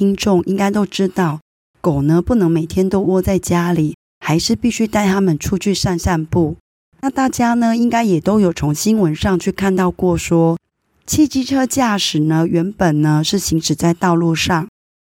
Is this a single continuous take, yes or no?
yes